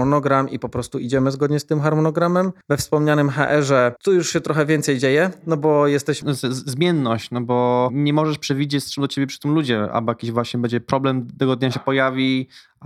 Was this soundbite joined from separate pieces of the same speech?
yes; 2 cuts; at 2.6 s, 6.2 s

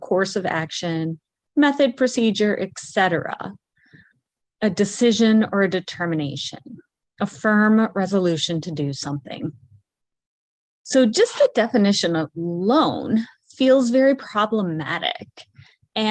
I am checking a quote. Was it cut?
no; 0 cuts

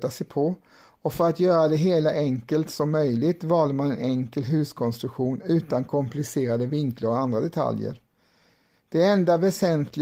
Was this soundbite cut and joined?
no; 0 cuts

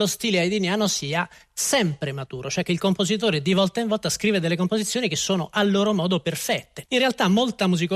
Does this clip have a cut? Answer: yes; 1 cut; at 6.9 s

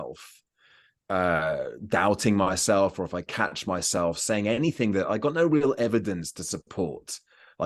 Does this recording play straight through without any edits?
yes; 0 cuts

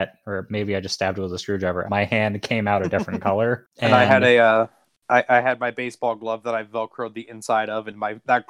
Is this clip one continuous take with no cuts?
no; 2 cuts; at 1.9 s, 3.7 s

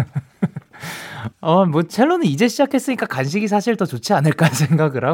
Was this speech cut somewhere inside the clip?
yes; 1 cut; at 1.3 s

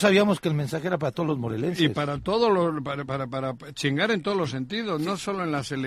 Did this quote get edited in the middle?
no; 0 cuts

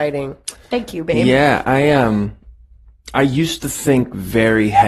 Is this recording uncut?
yes; 0 cuts

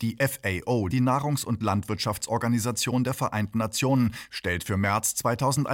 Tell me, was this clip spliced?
no; 0 cuts

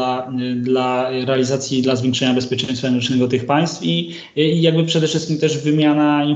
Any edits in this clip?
no; 0 cuts

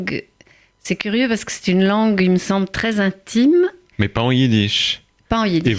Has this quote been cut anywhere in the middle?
yes; 1 cut; at 3.9 s

